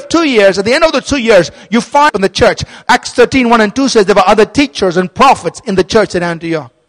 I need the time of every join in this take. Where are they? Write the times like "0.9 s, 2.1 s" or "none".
none